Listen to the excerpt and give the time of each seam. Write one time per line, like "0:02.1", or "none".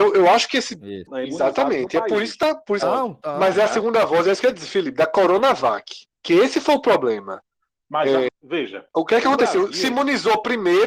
0:01.1
0:02.8
0:08.3